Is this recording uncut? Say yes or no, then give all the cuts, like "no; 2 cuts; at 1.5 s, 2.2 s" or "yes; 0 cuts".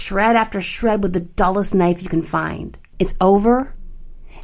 no; 1 cut; at 2.9 s